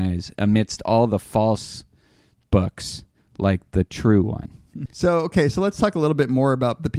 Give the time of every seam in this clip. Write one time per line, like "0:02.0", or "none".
0:04.9